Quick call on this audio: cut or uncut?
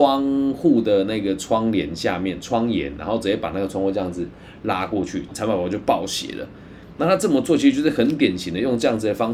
cut